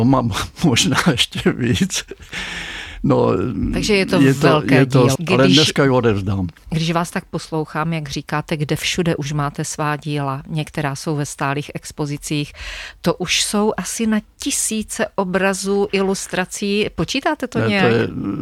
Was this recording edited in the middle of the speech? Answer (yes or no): yes